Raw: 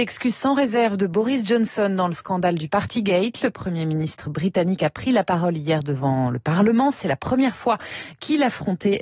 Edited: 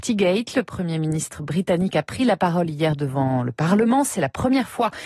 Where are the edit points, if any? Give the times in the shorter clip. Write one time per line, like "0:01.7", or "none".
none